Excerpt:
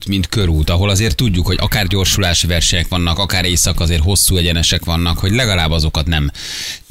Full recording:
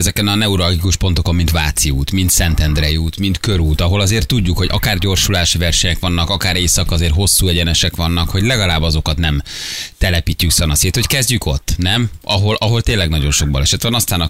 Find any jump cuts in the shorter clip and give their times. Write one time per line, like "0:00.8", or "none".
none